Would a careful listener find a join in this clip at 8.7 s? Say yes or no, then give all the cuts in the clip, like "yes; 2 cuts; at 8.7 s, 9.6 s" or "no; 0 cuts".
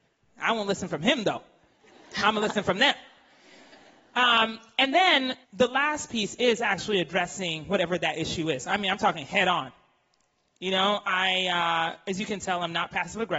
no; 1 cut; at 5.4 s